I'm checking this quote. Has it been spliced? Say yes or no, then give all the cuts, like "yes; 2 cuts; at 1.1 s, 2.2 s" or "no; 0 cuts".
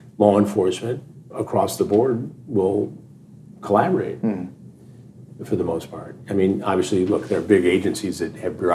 no; 0 cuts